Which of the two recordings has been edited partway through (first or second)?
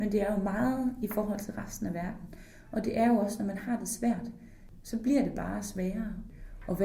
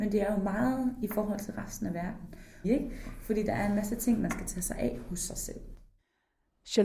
second